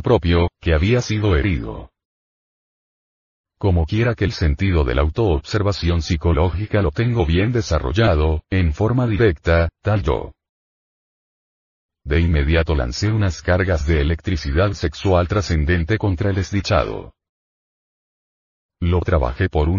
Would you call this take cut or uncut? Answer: cut